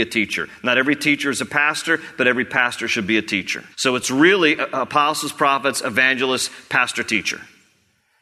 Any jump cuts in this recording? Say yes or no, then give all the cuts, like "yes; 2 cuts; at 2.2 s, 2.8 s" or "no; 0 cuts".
yes; 1 cut; at 3.7 s